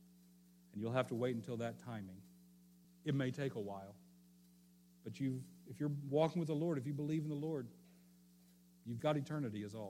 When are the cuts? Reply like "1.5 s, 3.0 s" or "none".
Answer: 2.8 s, 9.0 s